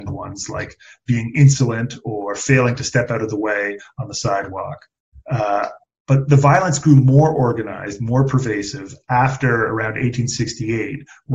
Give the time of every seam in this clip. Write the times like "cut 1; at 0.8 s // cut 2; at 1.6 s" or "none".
cut 1; at 5.1 s